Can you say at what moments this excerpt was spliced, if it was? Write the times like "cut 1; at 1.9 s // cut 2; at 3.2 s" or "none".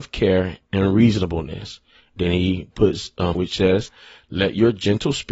cut 1; at 3.3 s